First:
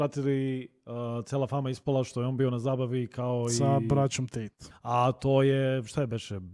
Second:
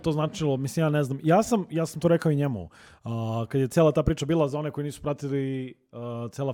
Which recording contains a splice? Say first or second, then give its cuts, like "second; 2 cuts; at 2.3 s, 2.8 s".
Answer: first; 1 cut; at 4.7 s